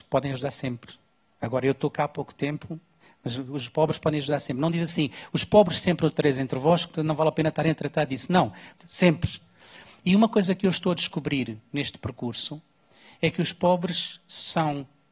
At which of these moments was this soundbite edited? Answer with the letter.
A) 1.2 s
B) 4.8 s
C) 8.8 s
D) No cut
C